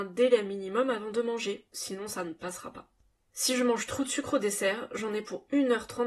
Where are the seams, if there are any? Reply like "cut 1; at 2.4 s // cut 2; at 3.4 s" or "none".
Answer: cut 1; at 1.7 s